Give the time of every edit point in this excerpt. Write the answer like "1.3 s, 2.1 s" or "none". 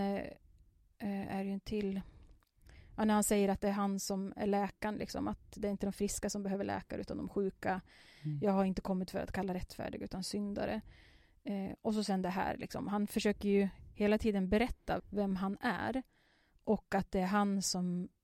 15.0 s